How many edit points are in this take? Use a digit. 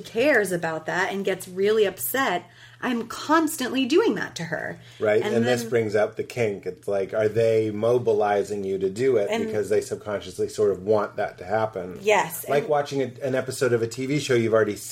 0